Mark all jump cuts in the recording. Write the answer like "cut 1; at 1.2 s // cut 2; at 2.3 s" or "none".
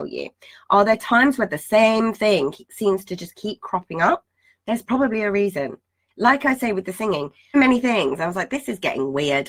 cut 1; at 7.5 s

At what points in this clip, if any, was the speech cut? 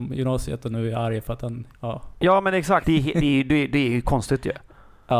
cut 1; at 1.7 s // cut 2; at 2.8 s

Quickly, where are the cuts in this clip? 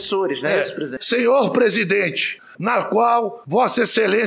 cut 1; at 1.0 s // cut 2; at 2.5 s

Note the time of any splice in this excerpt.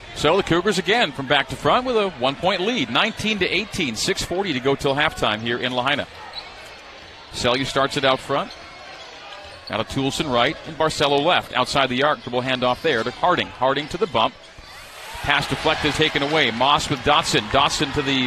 cut 1; at 15.9 s

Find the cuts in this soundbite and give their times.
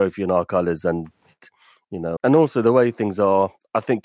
cut 1; at 2.2 s

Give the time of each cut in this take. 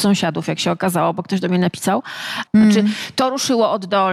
cut 1; at 2.5 s

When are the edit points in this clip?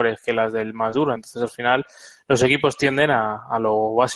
none

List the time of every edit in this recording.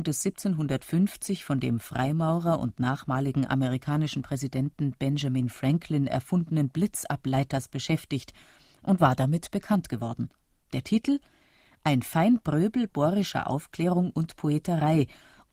cut 1; at 10.6 s

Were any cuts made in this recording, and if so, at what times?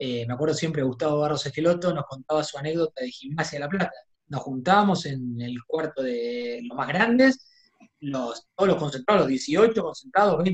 cut 1; at 4.1 s

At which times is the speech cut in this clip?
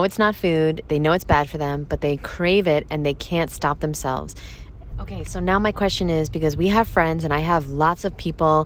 cut 1; at 4.9 s

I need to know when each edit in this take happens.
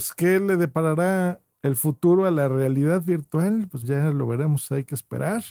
cut 1; at 3.8 s

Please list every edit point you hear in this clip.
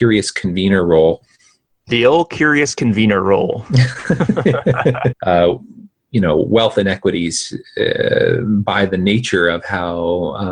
cut 1; at 5.1 s

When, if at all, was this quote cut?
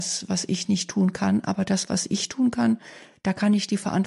none

